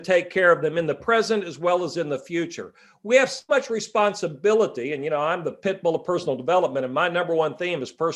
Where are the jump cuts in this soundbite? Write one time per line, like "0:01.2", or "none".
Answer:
0:03.5